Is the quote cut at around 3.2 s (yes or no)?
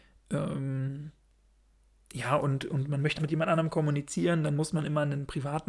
yes